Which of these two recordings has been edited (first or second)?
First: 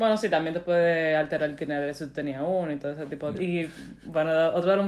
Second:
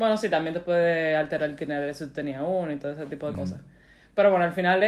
first